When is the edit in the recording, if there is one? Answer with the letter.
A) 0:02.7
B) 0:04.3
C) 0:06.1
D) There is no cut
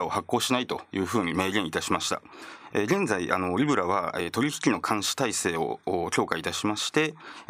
A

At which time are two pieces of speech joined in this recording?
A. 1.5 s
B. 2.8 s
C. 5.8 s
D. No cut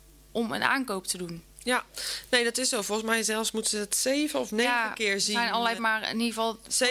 C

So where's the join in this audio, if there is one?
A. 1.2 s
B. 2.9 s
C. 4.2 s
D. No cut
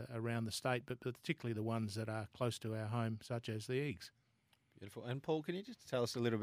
D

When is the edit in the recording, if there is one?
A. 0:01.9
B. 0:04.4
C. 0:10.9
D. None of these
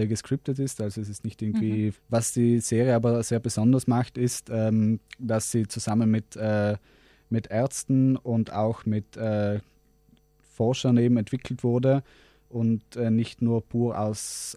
A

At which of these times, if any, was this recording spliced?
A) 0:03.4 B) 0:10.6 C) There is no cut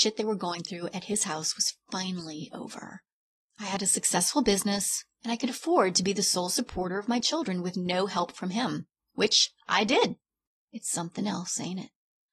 B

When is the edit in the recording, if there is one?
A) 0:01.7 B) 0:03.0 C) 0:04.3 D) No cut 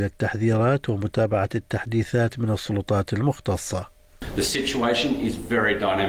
D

